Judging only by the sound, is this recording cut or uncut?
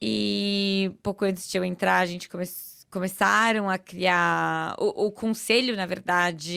uncut